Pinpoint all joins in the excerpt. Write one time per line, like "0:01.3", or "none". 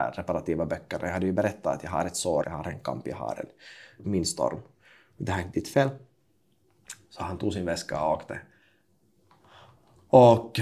0:02.4
0:04.0

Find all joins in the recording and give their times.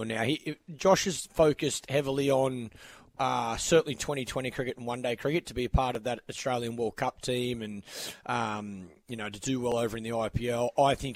none

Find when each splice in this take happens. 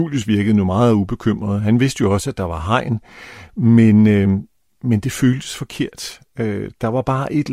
none

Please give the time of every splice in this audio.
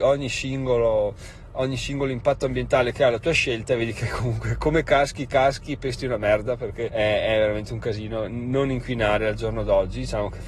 0:06.9

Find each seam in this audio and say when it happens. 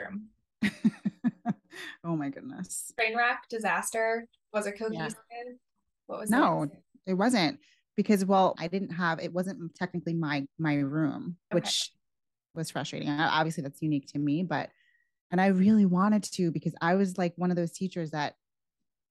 0:08.6
0:11.5

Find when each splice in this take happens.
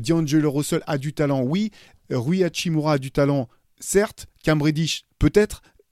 none

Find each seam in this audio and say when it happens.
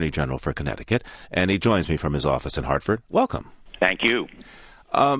none

